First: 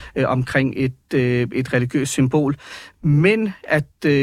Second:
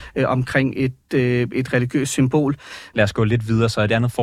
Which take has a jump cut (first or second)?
second